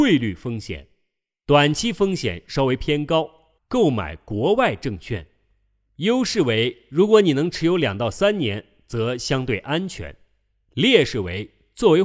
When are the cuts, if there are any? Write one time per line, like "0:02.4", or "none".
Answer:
0:03.6